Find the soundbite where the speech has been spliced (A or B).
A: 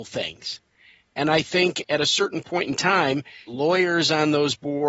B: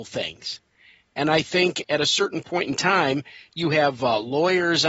A